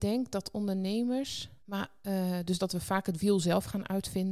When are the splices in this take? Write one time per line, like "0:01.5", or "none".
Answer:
0:01.6